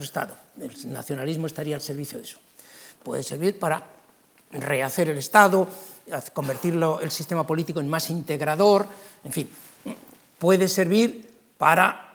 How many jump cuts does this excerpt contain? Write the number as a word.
one